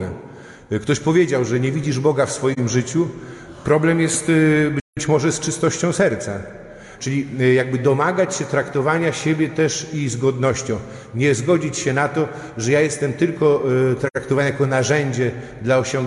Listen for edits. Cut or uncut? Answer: cut